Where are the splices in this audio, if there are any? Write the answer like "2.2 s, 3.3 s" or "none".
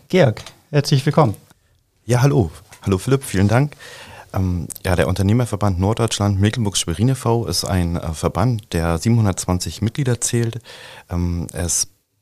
none